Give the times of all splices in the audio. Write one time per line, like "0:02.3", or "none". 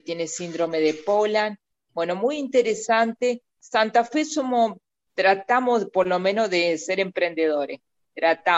0:03.5

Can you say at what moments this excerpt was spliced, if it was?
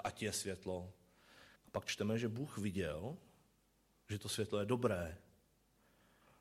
0:01.6

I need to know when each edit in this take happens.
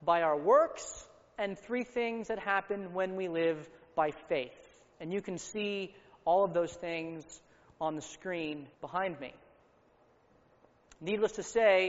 0:04.9
0:08.7

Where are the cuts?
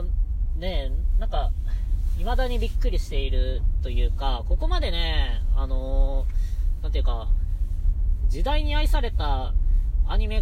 none

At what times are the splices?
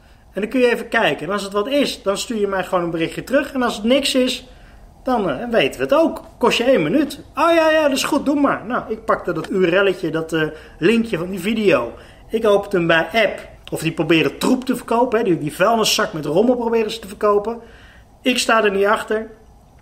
0:09.5
0:13.6

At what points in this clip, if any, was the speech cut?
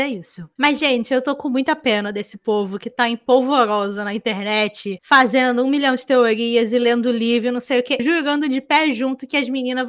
0:08.0

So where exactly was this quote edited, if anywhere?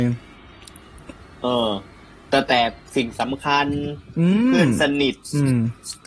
none

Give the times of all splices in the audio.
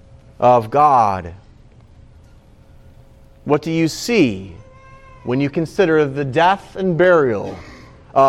none

